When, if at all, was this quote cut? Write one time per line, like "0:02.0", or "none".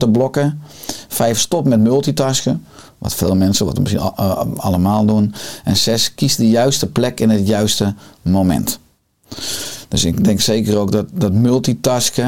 none